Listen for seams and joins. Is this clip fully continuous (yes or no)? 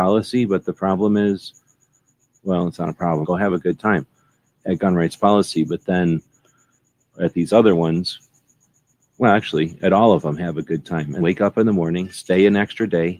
no